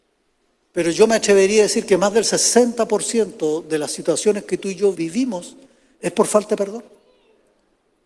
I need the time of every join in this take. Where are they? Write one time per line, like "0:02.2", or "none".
0:04.9